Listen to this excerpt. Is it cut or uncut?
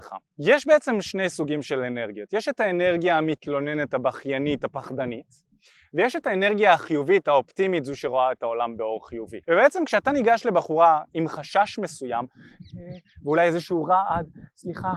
cut